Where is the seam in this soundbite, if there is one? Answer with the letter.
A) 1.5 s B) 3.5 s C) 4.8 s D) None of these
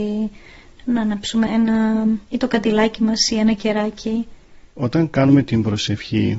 A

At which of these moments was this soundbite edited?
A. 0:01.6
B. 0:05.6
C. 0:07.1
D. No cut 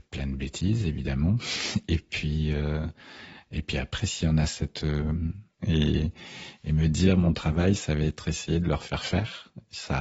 B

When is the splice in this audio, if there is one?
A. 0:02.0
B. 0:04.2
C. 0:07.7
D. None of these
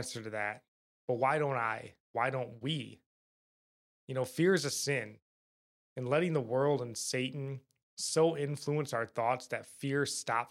A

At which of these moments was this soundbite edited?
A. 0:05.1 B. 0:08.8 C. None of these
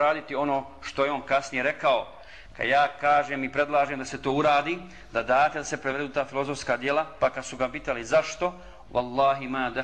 B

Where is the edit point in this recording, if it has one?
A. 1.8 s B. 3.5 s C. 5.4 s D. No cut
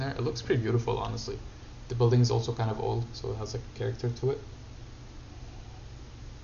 D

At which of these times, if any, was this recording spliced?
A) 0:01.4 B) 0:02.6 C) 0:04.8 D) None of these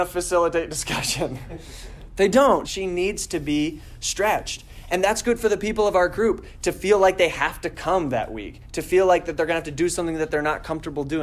B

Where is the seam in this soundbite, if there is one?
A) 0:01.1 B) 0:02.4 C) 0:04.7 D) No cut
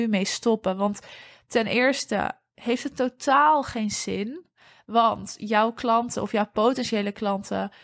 D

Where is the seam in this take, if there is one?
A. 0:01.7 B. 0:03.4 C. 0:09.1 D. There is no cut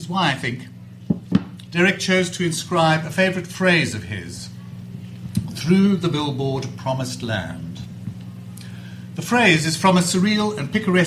A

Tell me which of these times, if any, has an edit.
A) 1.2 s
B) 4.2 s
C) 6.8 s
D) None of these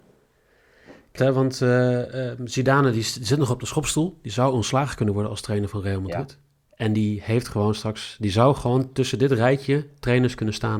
A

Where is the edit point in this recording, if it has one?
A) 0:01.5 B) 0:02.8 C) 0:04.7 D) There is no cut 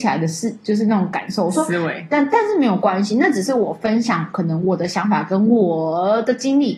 D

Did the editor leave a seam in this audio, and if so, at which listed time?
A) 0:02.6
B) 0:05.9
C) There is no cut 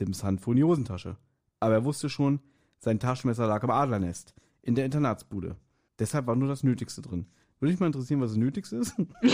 B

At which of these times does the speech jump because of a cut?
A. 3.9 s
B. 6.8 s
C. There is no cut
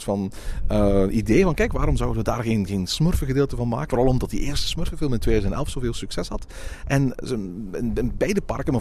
A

